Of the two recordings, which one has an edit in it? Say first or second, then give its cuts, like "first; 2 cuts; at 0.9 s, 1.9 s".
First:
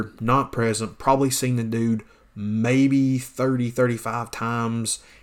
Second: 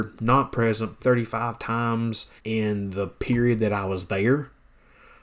second; 2 cuts; at 1.0 s, 2.4 s